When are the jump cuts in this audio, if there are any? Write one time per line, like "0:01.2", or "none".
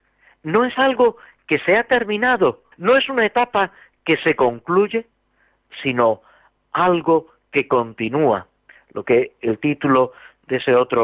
0:02.7